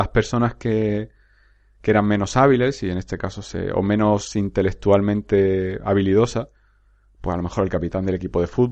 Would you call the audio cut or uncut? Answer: uncut